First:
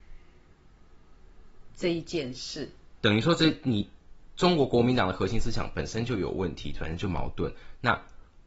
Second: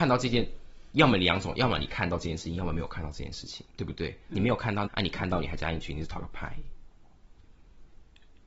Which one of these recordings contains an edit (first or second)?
second